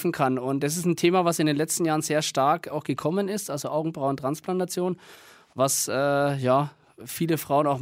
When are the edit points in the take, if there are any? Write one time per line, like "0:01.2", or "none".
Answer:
none